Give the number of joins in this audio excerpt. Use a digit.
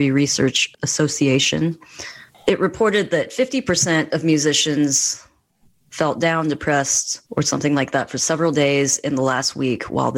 1